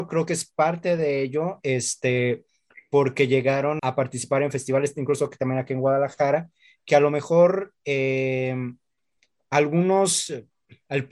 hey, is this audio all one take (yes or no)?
no